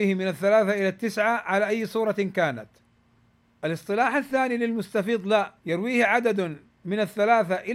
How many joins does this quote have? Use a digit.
1